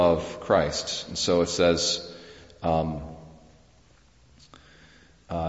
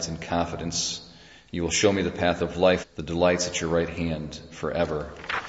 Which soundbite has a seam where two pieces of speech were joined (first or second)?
second